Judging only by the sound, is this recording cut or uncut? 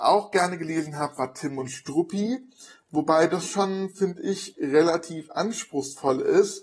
uncut